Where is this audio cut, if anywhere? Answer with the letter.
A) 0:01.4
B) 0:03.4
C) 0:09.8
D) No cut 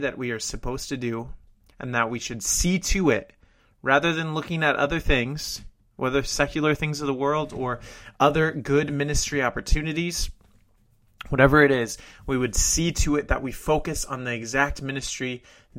D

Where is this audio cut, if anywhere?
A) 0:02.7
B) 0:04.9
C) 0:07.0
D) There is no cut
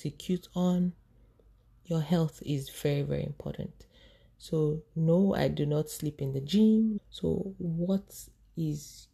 C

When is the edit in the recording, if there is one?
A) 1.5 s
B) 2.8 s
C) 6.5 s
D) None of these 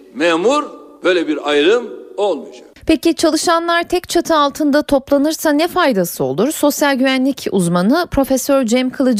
B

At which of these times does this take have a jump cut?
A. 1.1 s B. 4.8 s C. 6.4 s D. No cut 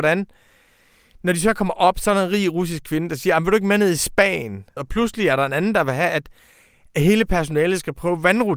B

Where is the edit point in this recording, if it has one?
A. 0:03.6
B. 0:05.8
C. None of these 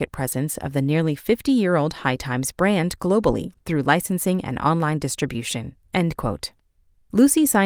B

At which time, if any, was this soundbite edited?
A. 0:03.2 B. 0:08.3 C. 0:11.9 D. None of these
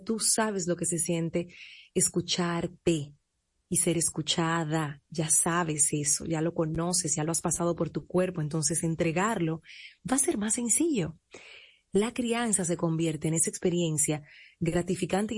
C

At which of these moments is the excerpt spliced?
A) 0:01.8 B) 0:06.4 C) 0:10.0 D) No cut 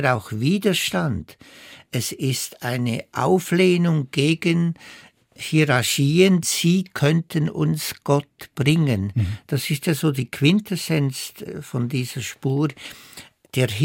B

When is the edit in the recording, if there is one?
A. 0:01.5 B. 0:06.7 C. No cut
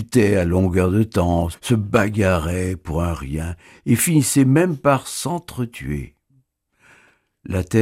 A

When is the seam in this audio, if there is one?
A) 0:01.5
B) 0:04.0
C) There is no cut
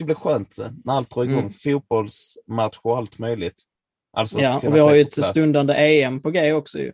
C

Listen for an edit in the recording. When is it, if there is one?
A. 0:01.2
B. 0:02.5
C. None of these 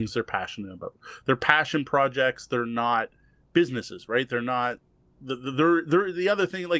C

